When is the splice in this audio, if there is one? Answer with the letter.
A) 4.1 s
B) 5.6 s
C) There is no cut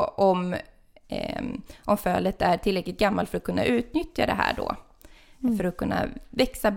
C